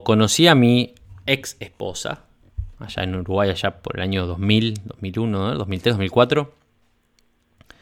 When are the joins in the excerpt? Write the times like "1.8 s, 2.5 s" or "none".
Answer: none